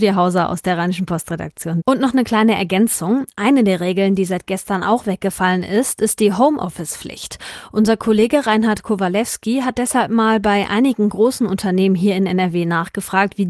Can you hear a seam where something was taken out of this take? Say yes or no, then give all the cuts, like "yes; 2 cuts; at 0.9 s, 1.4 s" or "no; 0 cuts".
yes; 1 cut; at 1.8 s